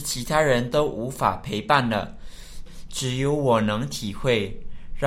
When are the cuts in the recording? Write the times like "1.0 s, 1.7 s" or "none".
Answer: 2.7 s